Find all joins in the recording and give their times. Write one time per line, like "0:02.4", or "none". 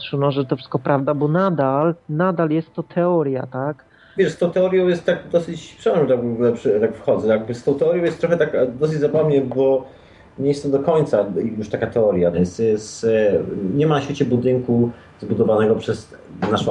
0:04.2
0:12.3